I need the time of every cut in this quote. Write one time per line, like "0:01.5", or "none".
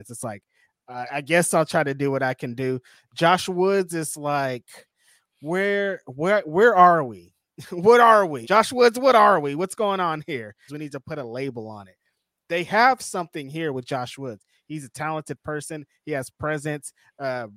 0:08.4
0:10.7